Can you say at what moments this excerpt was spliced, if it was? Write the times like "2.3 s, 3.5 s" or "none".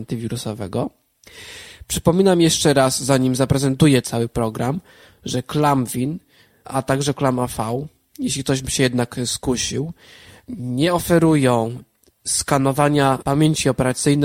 none